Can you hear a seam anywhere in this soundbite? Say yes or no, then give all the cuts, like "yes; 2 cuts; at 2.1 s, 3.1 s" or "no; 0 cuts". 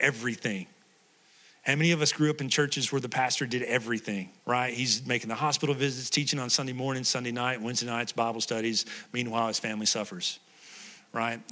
yes; 1 cut; at 4.4 s